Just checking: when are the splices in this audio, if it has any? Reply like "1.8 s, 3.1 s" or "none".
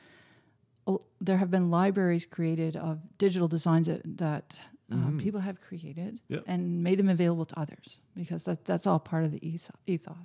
none